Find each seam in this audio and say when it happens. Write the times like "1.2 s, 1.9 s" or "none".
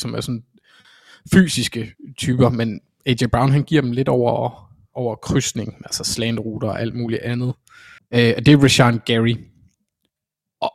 4.9 s, 8.0 s